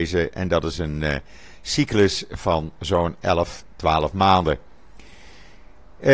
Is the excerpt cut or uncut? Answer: uncut